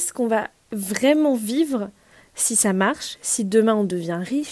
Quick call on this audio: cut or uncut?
uncut